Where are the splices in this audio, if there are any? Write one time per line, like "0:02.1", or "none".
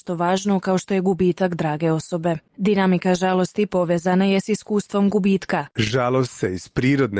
0:02.5
0:05.7